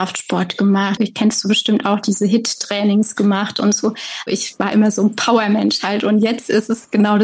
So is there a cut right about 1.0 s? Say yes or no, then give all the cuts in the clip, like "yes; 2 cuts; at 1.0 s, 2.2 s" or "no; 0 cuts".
yes; 1 cut; at 1.0 s